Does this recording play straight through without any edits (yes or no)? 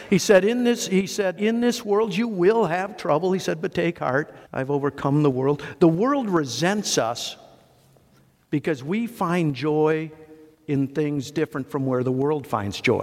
no